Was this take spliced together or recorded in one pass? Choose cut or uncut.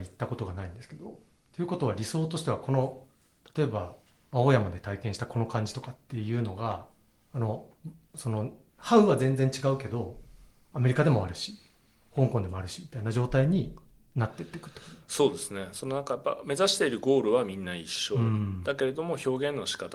uncut